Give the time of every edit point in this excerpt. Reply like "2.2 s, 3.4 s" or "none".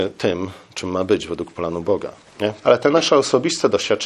2.6 s